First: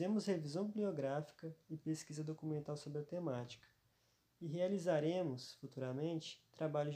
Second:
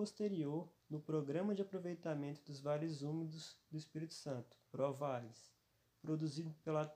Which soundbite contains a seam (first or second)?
second